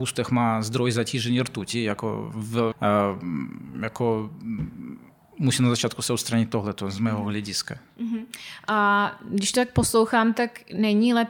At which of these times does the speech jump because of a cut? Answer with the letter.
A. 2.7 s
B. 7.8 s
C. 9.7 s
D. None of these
A